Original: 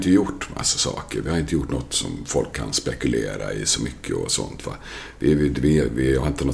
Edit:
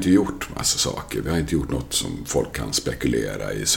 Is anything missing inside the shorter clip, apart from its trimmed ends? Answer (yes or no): no